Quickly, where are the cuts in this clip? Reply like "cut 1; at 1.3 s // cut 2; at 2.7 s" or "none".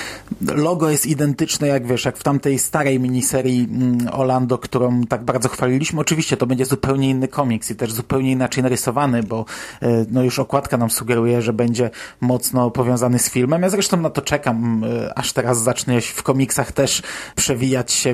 none